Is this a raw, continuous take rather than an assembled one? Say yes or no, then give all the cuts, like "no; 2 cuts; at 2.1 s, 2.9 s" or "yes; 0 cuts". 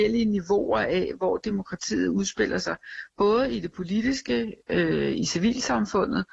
yes; 0 cuts